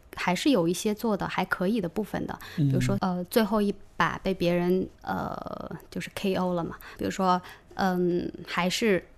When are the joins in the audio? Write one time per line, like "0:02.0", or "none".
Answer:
0:03.0
0:05.0
0:07.0